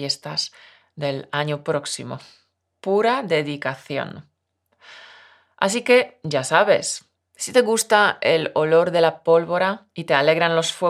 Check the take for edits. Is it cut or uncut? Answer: uncut